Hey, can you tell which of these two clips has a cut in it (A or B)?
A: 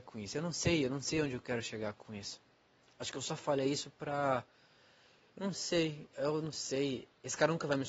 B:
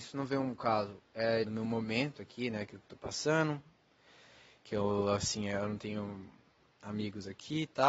B